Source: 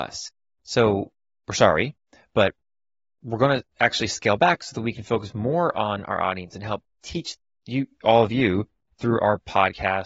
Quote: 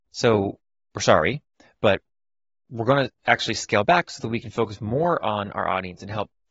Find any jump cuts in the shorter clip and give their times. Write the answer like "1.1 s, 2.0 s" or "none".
none